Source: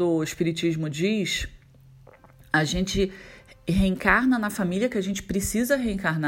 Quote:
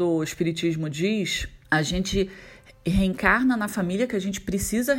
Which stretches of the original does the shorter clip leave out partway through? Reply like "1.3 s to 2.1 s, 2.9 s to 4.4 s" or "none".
1.6 s to 2.5 s